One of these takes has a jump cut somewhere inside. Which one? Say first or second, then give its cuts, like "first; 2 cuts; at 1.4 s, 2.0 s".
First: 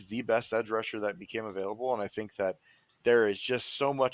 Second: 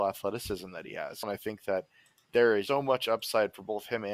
second; 2 cuts; at 1.2 s, 2.7 s